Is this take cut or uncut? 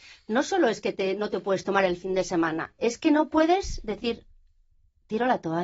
uncut